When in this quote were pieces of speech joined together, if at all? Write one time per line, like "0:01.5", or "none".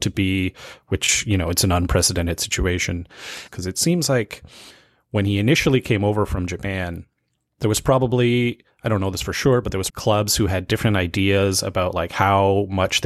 0:03.5
0:09.9